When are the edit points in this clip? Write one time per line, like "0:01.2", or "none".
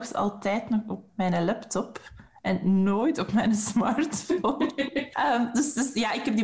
0:01.1
0:05.1